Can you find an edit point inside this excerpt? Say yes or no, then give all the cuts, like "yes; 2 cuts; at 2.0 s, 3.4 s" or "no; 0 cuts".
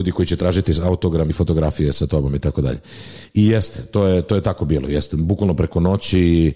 yes; 1 cut; at 1.3 s